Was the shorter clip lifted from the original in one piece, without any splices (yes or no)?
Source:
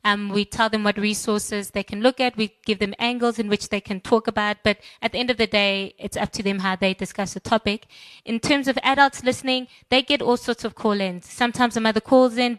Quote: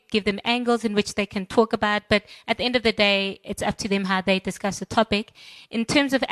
yes